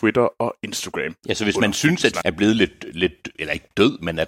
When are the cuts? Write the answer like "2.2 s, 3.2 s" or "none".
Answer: 2.2 s